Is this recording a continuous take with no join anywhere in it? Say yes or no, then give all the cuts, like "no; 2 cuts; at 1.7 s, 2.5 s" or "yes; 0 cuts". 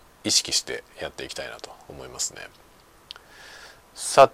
yes; 0 cuts